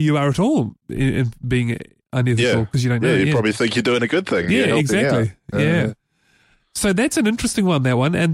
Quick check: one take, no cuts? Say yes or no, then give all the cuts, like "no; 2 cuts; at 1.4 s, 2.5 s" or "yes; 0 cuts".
yes; 0 cuts